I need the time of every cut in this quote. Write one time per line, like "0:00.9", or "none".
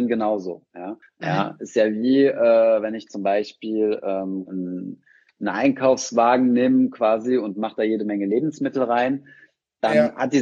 0:01.0
0:04.5